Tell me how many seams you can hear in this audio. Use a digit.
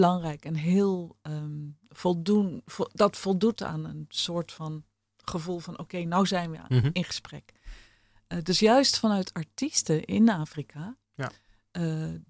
0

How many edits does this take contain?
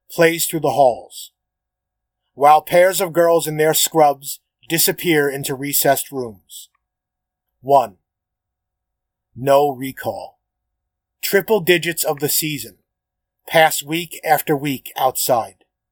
2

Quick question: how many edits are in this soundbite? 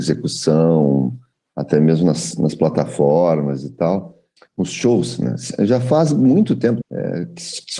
2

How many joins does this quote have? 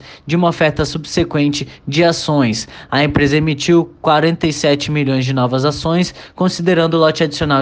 0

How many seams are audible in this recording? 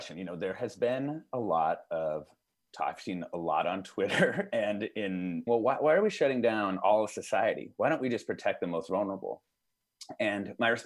1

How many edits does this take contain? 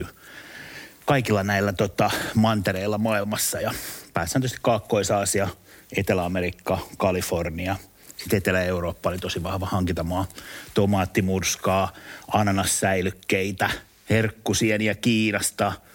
0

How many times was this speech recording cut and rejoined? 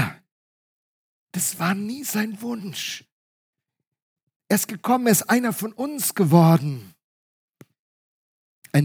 0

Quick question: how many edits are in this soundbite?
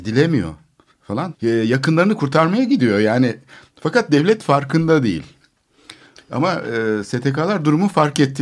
2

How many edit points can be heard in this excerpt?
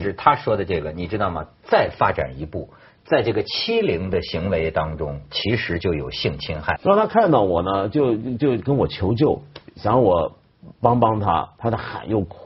1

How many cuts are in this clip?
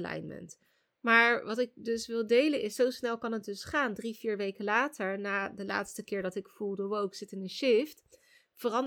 0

